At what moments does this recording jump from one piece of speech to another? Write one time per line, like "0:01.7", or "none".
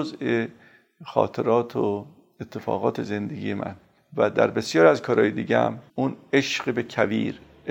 0:05.9

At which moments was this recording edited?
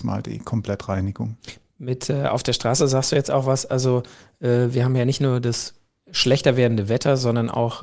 none

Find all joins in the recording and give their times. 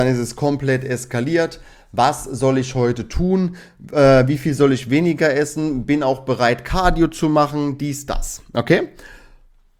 none

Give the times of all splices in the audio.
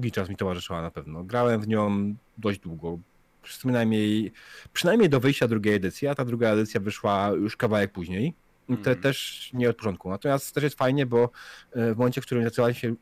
none

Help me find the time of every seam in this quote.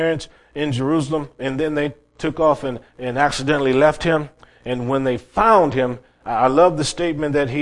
0:01.4

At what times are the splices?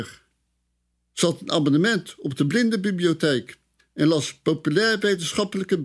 0:00.9

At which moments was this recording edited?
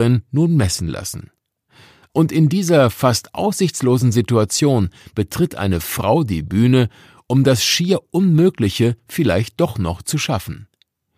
0:02.1

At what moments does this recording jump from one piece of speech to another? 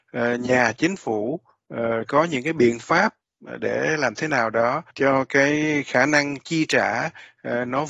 0:02.1
0:04.9

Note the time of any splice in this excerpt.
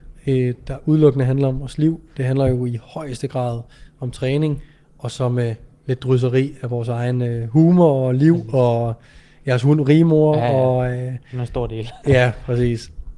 none

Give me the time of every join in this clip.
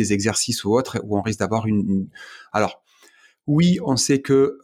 none

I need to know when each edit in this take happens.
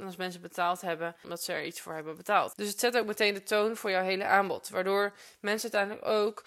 0:01.2
0:02.5

